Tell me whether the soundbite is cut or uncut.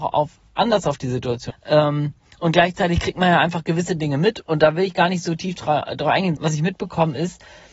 cut